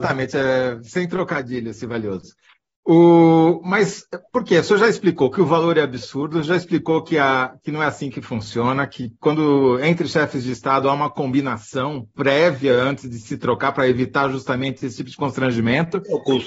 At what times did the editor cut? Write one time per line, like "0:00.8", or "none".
none